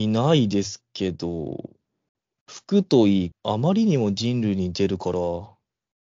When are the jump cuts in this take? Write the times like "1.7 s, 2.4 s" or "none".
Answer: 3.3 s